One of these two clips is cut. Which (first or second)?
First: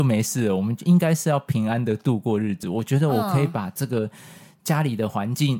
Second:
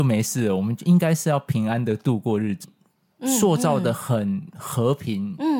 second